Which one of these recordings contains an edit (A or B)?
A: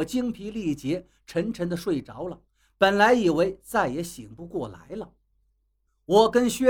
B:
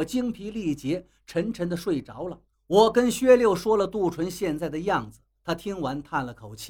B